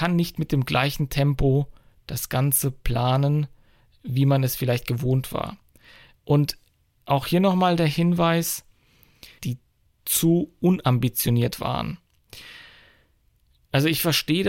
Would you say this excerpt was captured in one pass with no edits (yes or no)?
no